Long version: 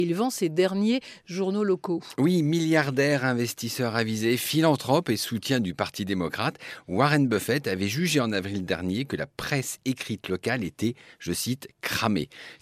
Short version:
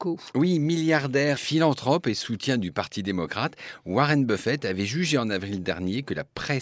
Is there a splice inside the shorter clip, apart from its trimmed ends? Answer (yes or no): yes